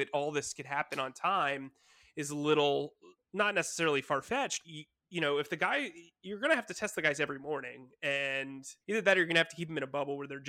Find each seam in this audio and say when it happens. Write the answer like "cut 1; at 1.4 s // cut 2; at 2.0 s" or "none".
cut 1; at 4.6 s // cut 2; at 8.8 s